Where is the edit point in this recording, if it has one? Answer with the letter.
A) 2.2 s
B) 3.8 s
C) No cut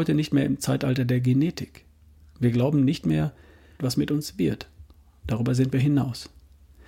B